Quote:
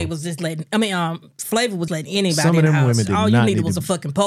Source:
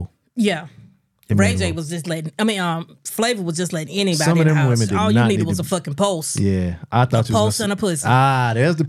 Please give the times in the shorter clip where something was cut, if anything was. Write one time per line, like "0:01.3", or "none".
0:01.9